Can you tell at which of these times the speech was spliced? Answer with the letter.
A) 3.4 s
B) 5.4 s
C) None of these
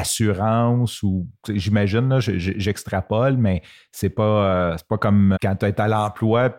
B